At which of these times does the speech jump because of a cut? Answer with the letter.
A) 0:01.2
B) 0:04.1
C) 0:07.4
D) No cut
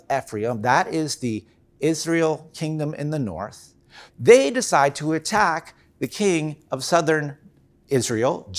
B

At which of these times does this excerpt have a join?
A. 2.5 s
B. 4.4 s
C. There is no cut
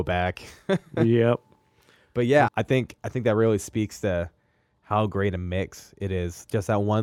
A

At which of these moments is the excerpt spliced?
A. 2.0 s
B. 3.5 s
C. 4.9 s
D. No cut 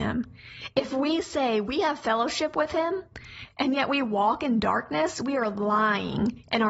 D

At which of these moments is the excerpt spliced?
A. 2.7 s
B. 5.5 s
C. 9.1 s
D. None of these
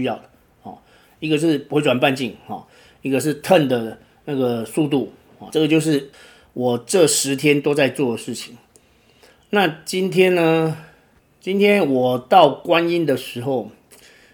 B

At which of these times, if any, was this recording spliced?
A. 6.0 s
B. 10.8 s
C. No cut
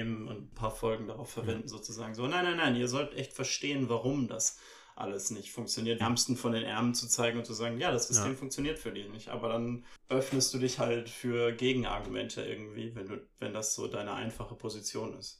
A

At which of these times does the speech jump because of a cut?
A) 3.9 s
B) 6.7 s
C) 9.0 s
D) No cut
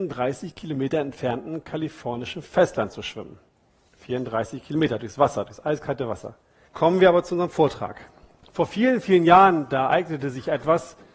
B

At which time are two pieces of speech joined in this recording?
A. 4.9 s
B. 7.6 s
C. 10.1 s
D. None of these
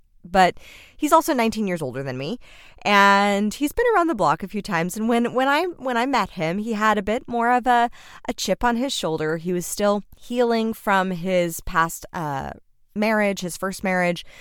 C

